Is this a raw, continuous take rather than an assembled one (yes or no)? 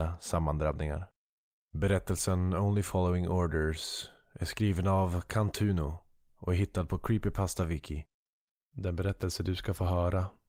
no